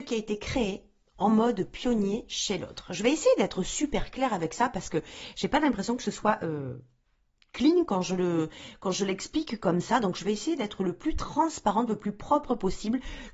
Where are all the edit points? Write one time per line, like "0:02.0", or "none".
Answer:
none